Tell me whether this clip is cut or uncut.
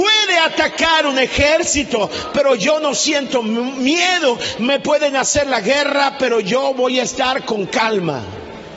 uncut